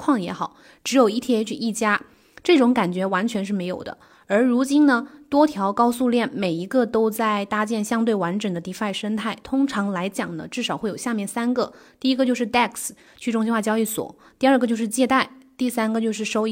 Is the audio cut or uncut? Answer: uncut